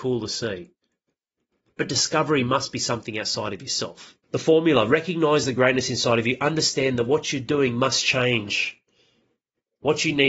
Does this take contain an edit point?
yes; 1 cut; at 4.2 s

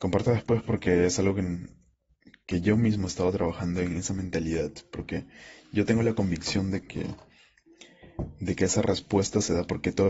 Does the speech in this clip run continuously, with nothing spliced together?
yes; 0 cuts

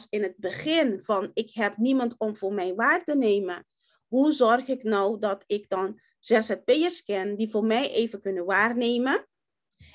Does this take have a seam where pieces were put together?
no; 0 cuts

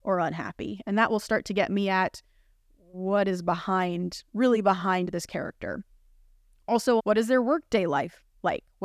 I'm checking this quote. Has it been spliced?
yes; 1 cut; at 7.0 s

